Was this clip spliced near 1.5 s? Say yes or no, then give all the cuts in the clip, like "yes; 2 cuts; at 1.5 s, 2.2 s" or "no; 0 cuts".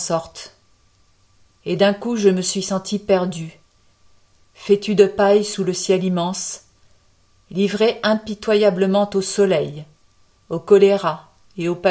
yes; 1 cut; at 1.5 s